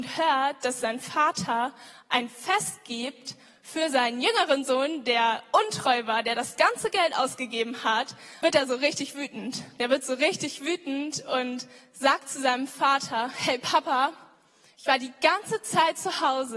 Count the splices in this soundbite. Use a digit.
1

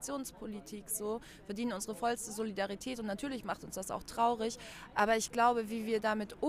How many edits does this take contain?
0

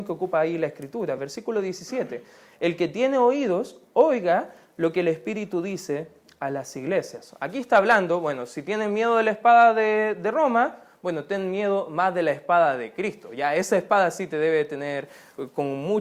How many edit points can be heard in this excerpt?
0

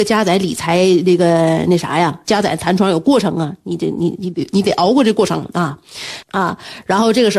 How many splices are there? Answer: 2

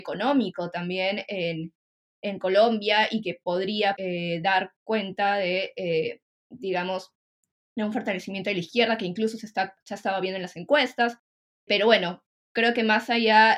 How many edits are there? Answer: 1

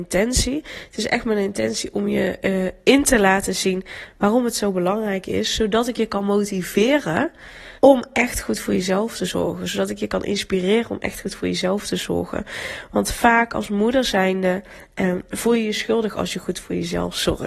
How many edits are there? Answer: 1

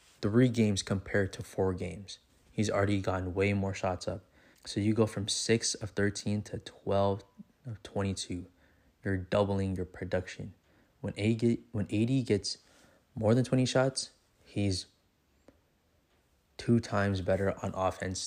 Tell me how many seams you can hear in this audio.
1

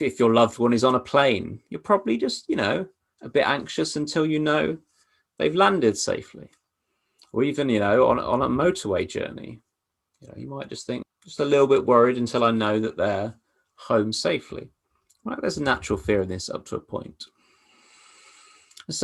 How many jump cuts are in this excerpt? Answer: 1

